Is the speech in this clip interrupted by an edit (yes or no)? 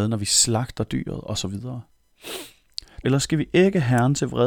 yes